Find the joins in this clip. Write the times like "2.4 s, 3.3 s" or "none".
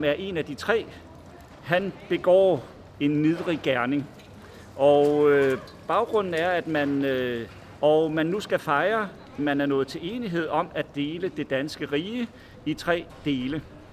7.8 s, 9.4 s